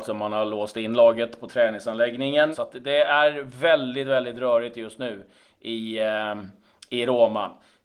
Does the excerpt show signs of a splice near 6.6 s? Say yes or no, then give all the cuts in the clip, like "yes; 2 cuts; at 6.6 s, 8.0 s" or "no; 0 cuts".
no; 1 cut; at 2.5 s